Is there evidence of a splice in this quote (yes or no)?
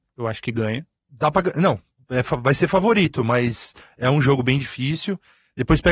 no